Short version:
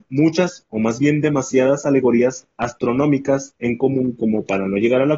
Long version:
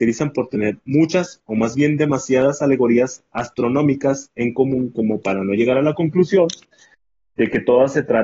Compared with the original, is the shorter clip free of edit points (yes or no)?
yes